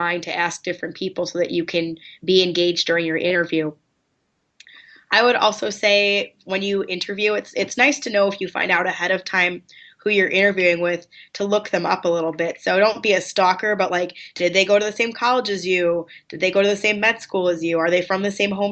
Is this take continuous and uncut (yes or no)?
yes